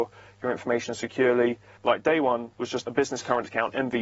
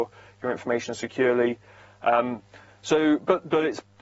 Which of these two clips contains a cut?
first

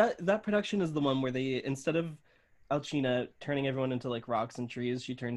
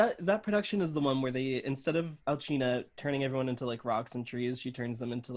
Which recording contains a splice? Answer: second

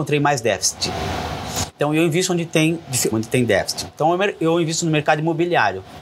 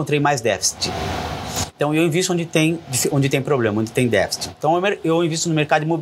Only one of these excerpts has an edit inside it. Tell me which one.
first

